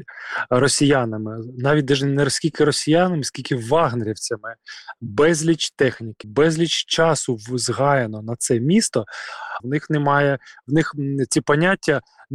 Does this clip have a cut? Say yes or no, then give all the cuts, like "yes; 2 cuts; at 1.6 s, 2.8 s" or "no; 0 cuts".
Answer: yes; 2 cuts; at 6.2 s, 9.6 s